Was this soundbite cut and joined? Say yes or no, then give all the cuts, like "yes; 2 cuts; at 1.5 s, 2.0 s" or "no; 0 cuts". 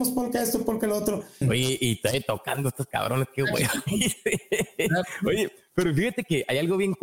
yes; 1 cut; at 1.4 s